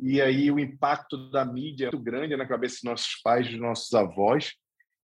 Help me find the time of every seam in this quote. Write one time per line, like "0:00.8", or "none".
0:01.9